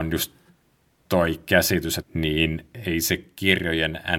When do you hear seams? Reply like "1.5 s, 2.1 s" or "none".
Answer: 2.0 s

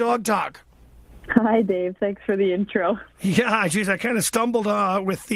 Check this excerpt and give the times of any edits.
none

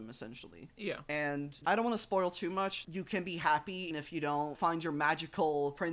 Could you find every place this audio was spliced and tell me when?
2.8 s, 3.9 s

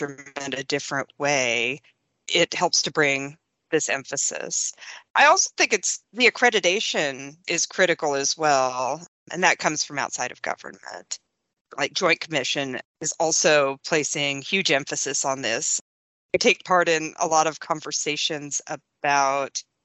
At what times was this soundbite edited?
5.1 s

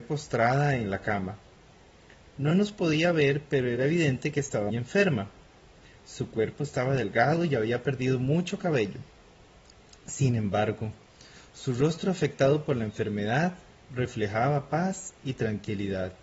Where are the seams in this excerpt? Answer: 4.7 s

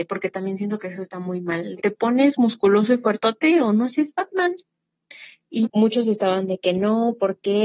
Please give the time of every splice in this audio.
1.8 s, 5.6 s

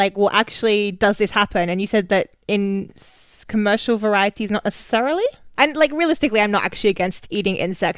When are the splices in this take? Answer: 5.6 s

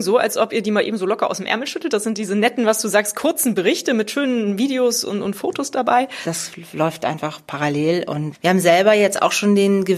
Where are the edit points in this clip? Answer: 6.2 s

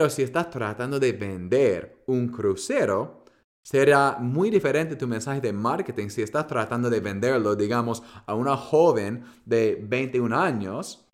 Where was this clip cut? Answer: none

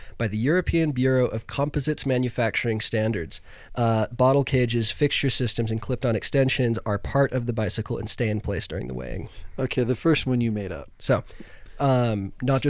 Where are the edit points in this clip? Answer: 3.7 s, 10.9 s

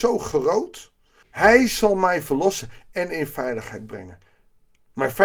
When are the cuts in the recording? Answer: 1.2 s

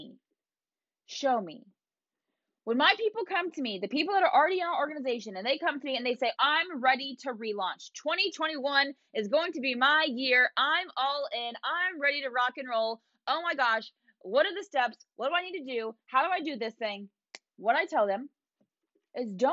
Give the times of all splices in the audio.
6.3 s, 17.5 s

